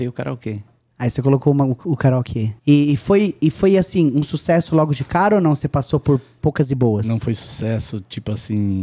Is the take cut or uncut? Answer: cut